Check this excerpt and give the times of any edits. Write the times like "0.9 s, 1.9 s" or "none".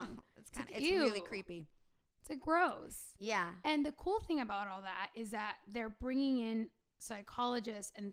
none